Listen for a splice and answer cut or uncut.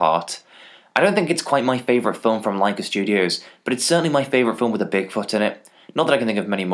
uncut